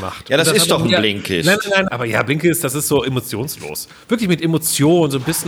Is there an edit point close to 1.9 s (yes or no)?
yes